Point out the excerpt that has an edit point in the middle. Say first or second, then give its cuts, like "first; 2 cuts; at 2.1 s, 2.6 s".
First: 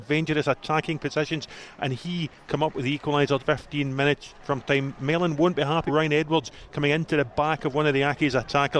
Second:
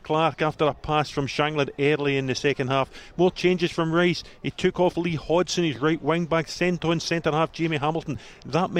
first; 2 cuts; at 3.4 s, 5.9 s